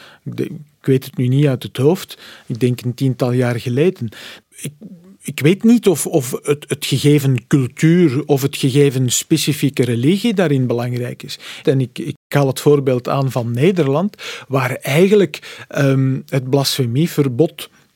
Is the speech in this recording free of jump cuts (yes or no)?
no